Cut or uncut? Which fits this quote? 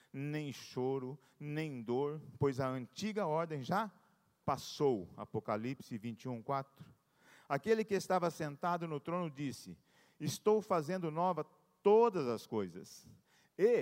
uncut